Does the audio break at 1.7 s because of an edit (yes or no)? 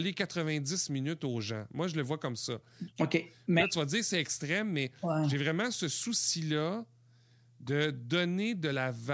no